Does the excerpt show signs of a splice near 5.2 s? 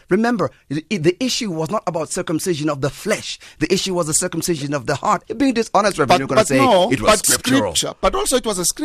yes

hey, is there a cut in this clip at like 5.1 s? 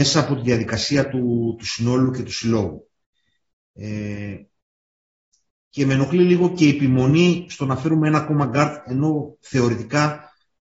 no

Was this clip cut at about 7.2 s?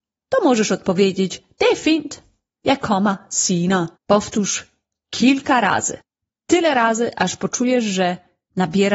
no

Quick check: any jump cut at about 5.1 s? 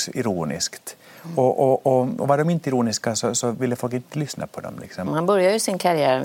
yes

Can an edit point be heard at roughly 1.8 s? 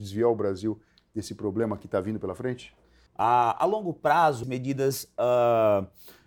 no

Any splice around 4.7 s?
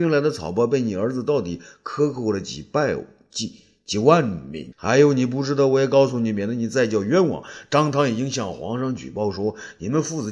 yes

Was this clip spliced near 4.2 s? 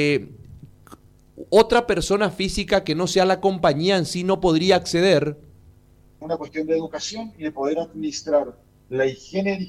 no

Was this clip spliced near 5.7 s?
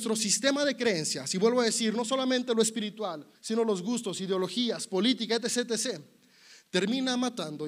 no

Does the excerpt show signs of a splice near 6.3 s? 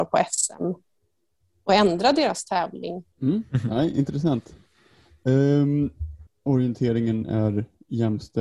yes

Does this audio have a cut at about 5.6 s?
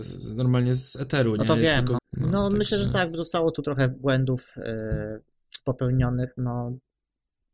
no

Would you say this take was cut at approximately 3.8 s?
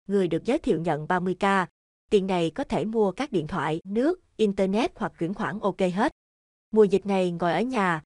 yes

